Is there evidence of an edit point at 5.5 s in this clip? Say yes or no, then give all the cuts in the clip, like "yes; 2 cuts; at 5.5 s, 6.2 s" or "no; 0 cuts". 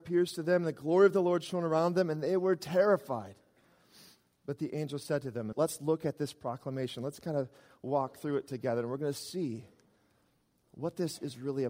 yes; 1 cut; at 5.5 s